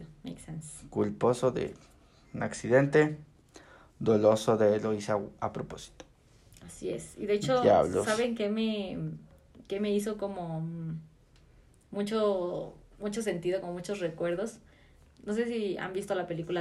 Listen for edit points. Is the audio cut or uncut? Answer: uncut